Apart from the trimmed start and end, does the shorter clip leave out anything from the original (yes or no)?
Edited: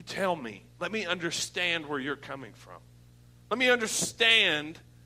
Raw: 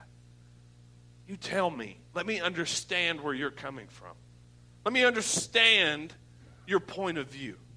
no